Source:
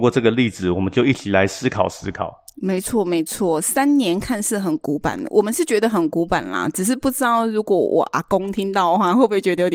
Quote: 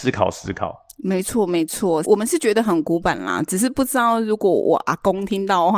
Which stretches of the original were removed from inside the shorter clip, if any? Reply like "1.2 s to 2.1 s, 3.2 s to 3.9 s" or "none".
3.6 s to 5.3 s